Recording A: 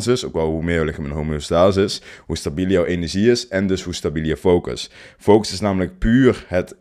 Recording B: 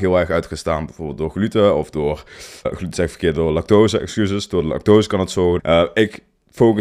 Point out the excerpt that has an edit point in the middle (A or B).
B